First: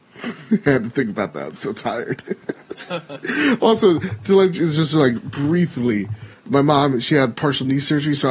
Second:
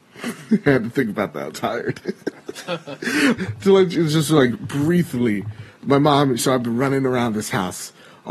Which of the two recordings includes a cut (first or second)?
second